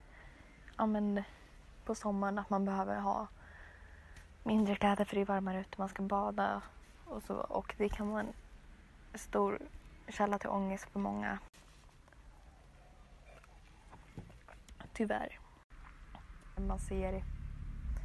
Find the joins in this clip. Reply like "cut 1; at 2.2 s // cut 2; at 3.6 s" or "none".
cut 1; at 16.6 s